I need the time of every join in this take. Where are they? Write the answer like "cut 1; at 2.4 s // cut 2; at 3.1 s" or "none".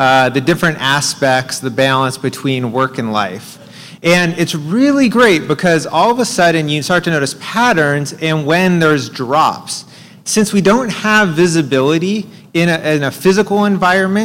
cut 1; at 4.0 s